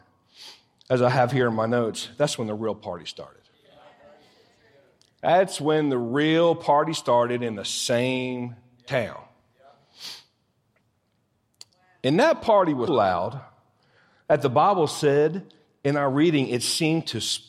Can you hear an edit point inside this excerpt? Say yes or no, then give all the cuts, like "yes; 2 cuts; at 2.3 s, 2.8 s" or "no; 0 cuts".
yes; 1 cut; at 12.9 s